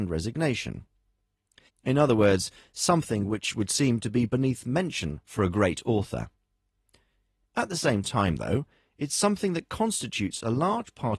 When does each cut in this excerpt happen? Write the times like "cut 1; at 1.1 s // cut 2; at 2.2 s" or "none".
cut 1; at 1.7 s